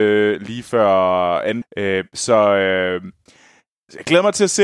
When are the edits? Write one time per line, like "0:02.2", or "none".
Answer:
0:01.6